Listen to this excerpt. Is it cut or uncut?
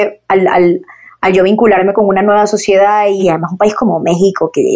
cut